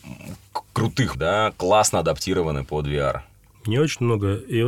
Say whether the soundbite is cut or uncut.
cut